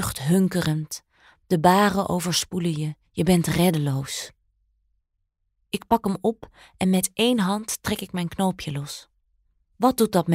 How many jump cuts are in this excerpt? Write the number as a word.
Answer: one